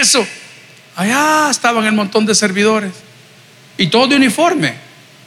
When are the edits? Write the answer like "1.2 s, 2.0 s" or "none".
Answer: none